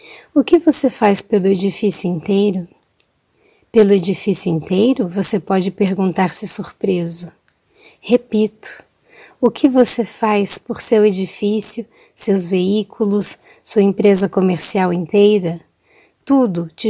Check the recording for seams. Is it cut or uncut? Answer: uncut